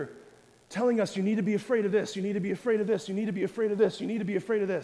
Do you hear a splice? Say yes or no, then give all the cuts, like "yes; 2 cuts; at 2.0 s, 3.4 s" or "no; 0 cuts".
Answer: no; 0 cuts